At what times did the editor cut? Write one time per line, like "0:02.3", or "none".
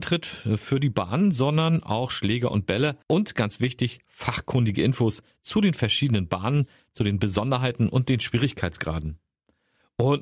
0:03.0

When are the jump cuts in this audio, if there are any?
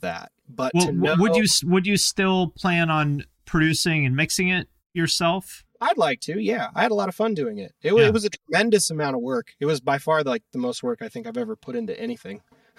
none

